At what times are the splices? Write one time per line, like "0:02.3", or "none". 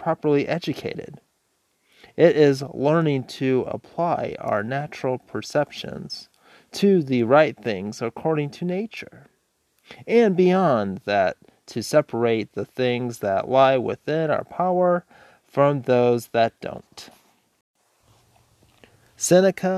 none